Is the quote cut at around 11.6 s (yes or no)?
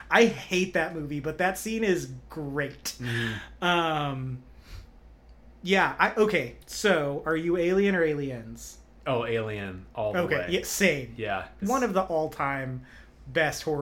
yes